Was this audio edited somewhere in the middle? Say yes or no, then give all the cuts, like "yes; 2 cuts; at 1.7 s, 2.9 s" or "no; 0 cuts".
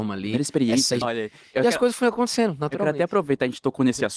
yes; 1 cut; at 1.0 s